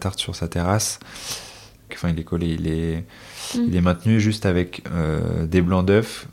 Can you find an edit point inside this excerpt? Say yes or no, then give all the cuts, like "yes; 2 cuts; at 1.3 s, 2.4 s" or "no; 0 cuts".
yes; 1 cut; at 1.9 s